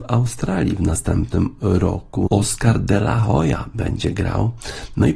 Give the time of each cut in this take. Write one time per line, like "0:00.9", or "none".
0:02.3